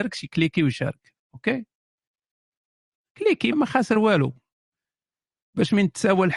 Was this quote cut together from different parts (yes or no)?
yes